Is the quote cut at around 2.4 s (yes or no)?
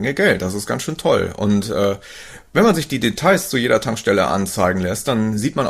no